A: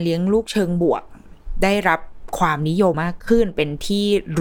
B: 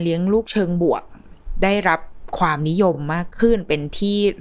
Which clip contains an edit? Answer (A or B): A